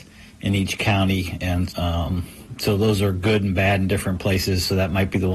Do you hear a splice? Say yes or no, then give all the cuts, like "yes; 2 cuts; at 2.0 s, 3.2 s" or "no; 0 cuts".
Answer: yes; 1 cut; at 1.7 s